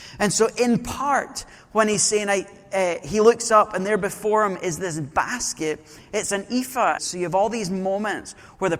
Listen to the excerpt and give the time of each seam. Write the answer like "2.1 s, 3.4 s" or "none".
7.0 s